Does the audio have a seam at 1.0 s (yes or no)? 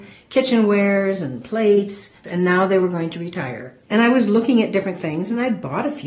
no